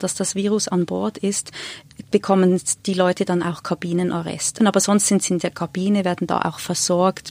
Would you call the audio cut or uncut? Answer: cut